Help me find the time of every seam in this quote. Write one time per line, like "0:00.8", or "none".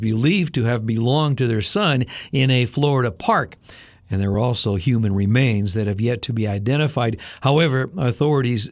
none